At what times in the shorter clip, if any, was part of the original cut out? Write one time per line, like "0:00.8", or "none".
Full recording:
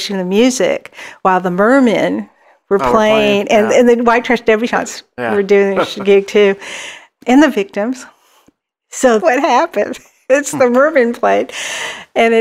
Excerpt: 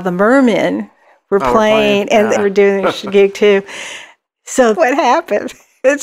0:02.3
0:04.2